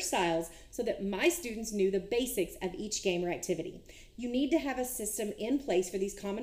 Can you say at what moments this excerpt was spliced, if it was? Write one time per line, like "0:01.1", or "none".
0:04.1